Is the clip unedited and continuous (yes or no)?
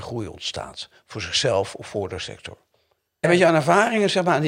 no